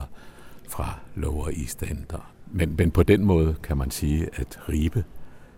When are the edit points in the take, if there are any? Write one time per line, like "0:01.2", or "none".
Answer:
0:02.3
0:04.3